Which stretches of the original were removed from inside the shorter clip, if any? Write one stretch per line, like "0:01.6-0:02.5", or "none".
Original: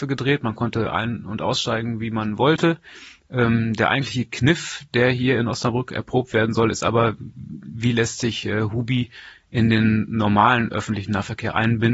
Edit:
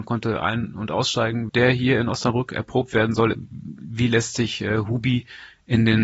0:02.0-0:04.9
0:06.7-0:07.2

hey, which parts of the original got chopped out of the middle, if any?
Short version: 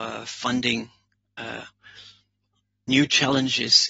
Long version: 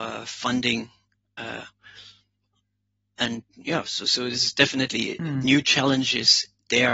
0:02.9-0:05.4

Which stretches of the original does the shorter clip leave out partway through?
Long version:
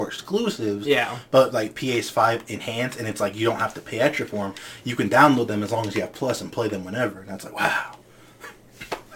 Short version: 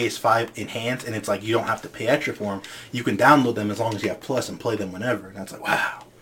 none

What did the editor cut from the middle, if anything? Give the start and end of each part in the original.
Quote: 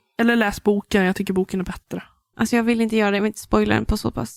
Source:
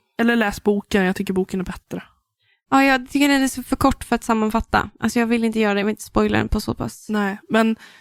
0:02.3-0:05.0

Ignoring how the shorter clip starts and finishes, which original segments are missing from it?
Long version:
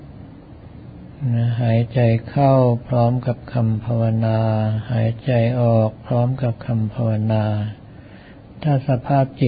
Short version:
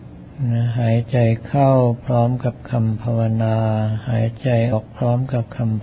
0:05.5-0:05.8

